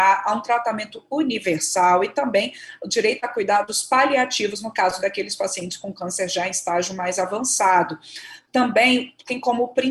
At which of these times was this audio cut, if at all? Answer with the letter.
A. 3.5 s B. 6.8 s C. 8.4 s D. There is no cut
D